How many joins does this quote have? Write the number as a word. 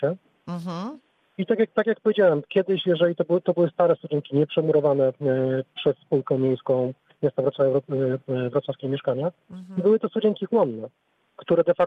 zero